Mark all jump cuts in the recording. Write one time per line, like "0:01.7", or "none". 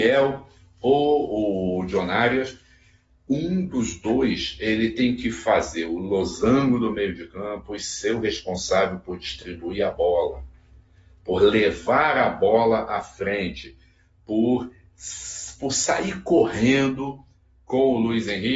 none